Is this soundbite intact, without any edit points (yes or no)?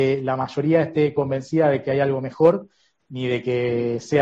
yes